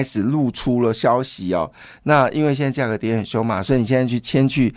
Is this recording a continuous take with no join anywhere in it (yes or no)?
no